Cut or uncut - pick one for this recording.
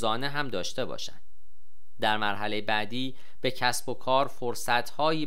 uncut